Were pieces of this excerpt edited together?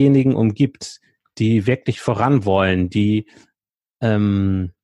no; 0 cuts

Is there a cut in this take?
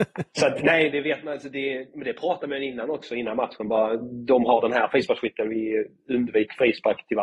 no; 0 cuts

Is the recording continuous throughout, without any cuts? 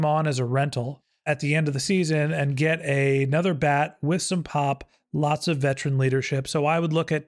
yes; 0 cuts

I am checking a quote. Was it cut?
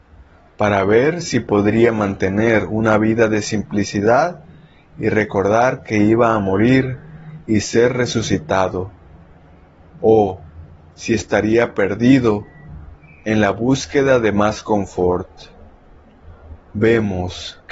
no; 0 cuts

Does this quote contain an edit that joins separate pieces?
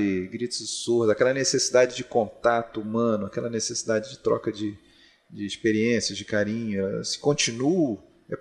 no; 0 cuts

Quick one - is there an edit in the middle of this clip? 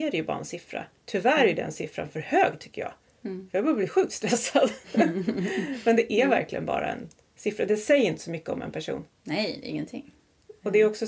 no; 0 cuts

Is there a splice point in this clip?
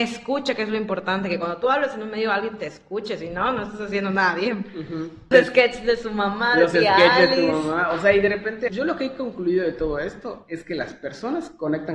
yes; 2 cuts; at 5.3 s, 8.7 s

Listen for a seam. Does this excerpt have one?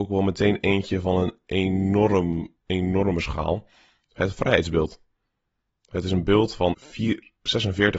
yes; 1 cut; at 6.7 s

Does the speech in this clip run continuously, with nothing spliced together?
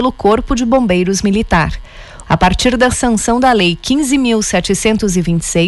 no; 1 cut; at 2.2 s

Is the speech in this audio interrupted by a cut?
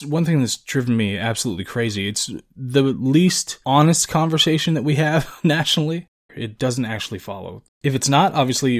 yes; 2 cuts; at 6.3 s, 7.7 s

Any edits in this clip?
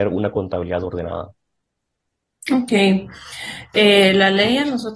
no; 0 cuts

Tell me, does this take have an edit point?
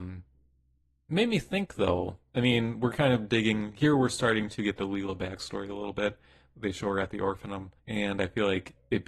yes; 1 cut; at 7.8 s

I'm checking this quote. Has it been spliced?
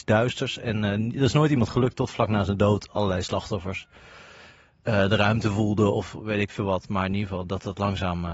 no; 0 cuts

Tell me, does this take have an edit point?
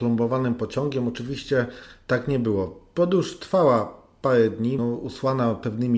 yes; 1 cut; at 4.8 s

